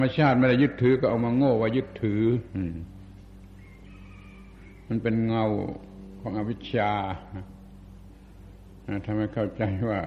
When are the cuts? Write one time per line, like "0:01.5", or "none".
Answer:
none